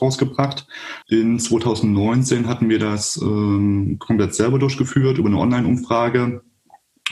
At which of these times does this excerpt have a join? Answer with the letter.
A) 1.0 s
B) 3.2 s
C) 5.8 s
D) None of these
A